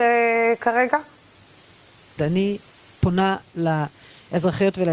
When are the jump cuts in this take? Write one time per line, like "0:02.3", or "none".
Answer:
0:02.2

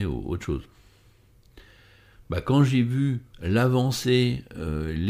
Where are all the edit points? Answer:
0:03.3

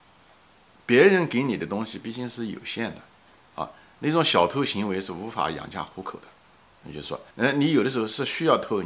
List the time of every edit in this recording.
0:07.3

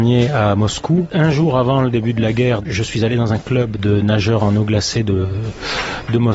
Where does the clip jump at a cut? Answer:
none

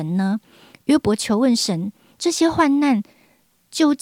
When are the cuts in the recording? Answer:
none

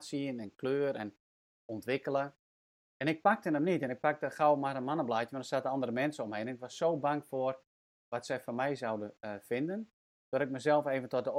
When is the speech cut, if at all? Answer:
none

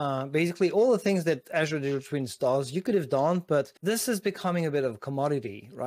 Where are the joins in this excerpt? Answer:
0:03.8

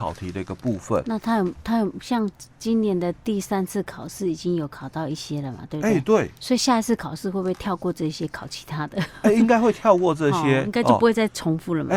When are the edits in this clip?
none

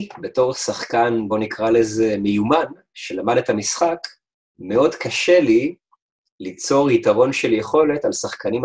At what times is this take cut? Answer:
none

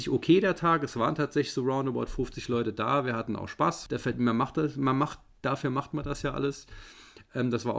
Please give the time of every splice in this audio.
0:03.9

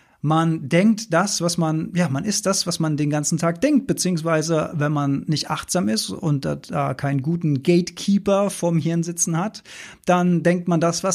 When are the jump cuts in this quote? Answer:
none

